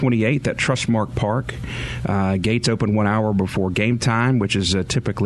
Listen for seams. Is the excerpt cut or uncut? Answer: uncut